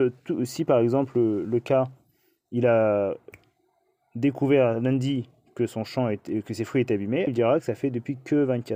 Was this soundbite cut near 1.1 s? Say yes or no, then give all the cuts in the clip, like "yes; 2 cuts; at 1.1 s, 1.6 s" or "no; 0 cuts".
no; 1 cut; at 7.3 s